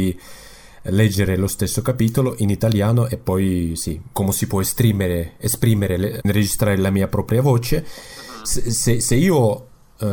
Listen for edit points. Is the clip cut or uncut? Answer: cut